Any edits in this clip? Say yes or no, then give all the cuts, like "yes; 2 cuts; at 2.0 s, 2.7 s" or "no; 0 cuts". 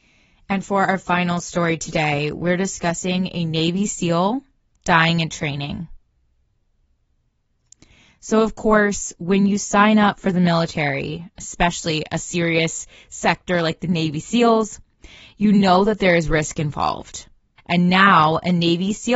yes; 1 cut; at 17.6 s